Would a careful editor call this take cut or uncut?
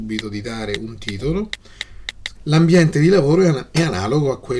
cut